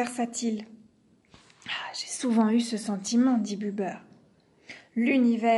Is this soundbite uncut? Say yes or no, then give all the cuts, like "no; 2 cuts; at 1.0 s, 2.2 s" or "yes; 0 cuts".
yes; 0 cuts